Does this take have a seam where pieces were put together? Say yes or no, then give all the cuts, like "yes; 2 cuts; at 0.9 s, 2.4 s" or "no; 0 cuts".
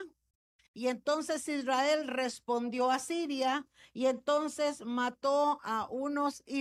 no; 0 cuts